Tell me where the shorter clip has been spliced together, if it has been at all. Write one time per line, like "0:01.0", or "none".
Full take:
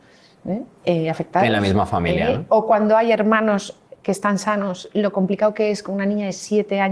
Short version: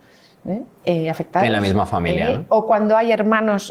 none